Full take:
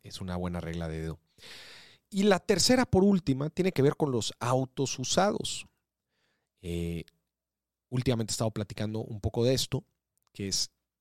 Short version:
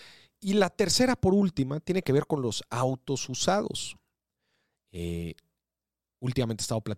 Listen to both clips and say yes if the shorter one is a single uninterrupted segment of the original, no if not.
yes